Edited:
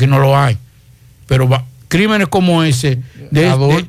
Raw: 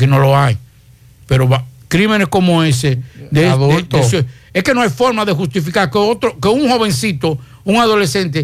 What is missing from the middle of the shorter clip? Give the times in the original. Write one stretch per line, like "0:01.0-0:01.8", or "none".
none